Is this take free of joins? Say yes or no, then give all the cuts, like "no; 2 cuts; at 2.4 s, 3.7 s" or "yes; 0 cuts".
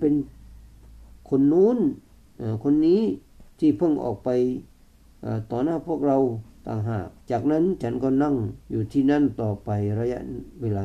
no; 3 cuts; at 1.2 s, 7.2 s, 8.6 s